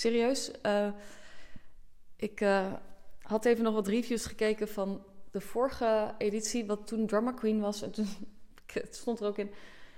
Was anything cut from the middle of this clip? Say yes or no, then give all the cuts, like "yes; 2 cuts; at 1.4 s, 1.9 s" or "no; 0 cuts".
no; 0 cuts